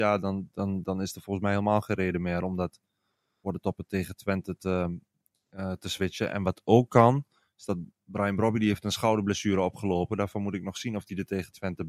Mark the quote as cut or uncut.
uncut